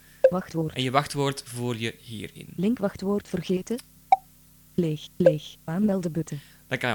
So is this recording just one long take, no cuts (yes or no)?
yes